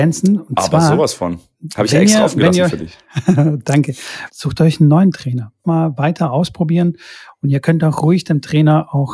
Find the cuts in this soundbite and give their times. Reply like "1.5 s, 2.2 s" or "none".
4.3 s, 5.6 s